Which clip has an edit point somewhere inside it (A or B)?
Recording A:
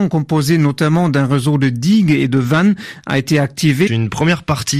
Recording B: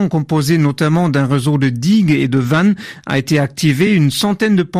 A